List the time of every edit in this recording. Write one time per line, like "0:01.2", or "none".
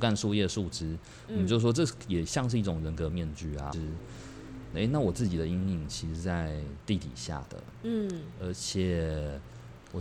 0:03.7
0:04.7